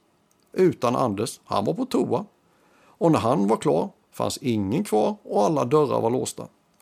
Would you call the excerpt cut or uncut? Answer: uncut